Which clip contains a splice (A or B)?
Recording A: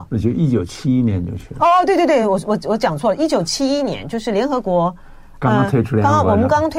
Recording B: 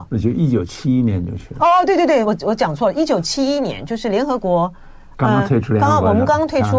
B